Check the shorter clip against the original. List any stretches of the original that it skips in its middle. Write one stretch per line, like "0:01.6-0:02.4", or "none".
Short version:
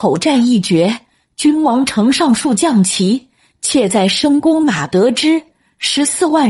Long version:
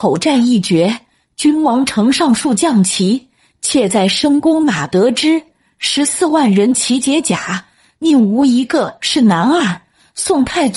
none